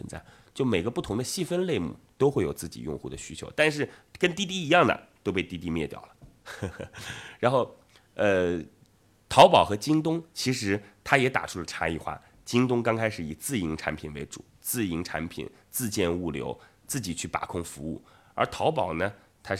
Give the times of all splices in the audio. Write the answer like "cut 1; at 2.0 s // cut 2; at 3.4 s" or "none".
none

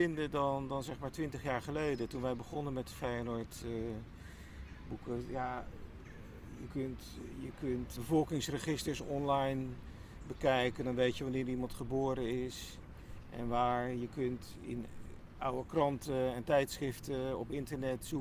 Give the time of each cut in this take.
cut 1; at 8.0 s

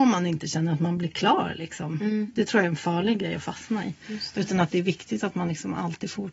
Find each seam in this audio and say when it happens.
none

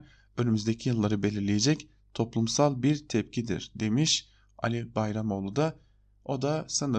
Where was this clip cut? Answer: none

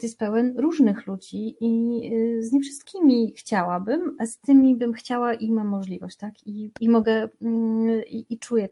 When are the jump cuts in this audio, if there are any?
cut 1; at 6.8 s

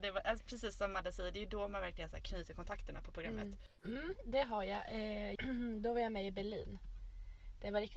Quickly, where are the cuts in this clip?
cut 1; at 3.8 s // cut 2; at 5.4 s

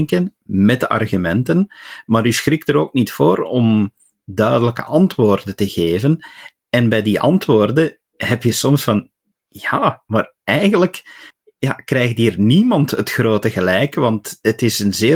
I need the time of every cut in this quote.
none

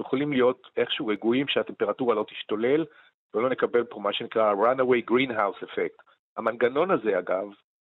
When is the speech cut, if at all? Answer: cut 1; at 6.3 s

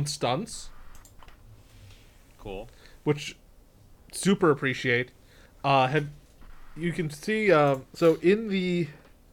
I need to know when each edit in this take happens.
none

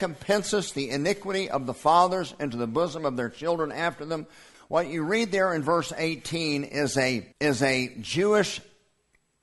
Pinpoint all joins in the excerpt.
cut 1; at 4.5 s // cut 2; at 7.3 s

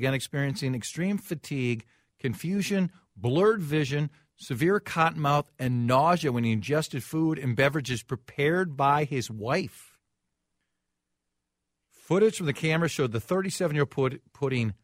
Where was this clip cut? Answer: none

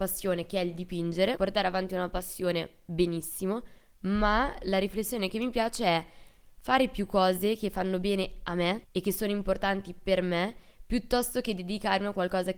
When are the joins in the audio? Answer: cut 1; at 1.4 s // cut 2; at 8.8 s

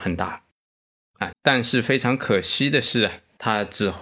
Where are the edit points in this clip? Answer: cut 1; at 1.3 s

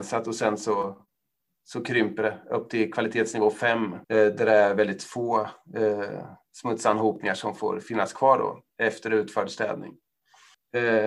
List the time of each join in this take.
cut 1; at 4.0 s

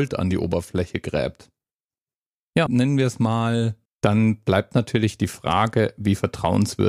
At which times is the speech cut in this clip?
cut 1; at 2.7 s // cut 2; at 3.9 s

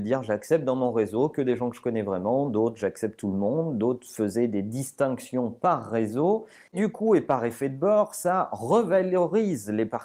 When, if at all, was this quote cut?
cut 1; at 6.7 s

